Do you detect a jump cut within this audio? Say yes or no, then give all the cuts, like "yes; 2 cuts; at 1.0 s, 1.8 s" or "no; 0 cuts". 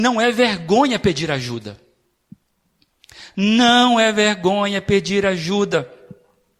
no; 0 cuts